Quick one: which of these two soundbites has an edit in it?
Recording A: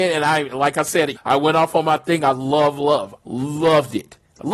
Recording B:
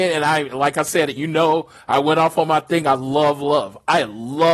A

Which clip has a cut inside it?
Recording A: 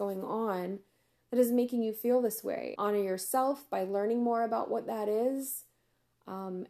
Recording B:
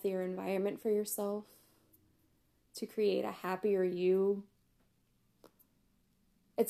A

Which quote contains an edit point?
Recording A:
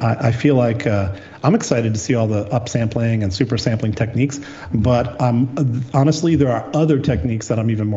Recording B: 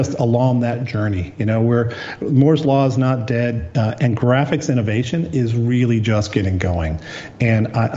B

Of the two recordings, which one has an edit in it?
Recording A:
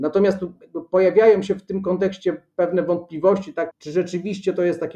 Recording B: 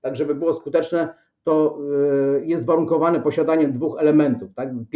A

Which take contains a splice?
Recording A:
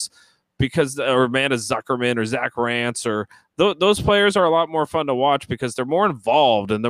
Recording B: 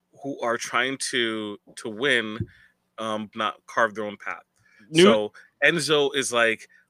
B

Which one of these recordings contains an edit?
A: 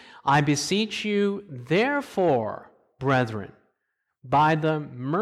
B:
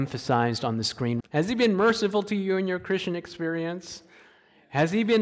B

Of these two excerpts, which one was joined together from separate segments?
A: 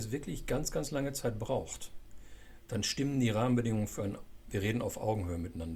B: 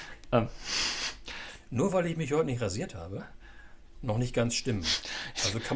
B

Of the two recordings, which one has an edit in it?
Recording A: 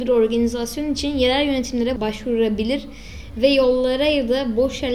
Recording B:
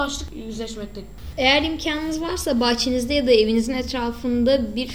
B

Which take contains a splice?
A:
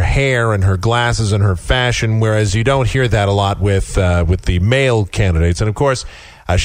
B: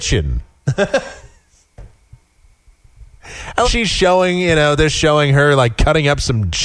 B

